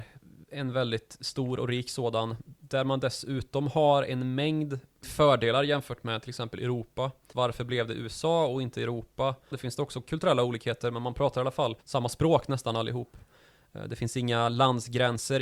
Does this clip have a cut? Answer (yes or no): yes